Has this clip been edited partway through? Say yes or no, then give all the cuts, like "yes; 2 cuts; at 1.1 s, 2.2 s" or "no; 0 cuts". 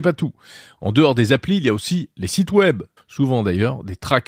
yes; 1 cut; at 3.0 s